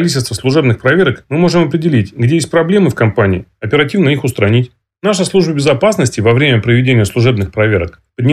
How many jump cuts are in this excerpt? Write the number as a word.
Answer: zero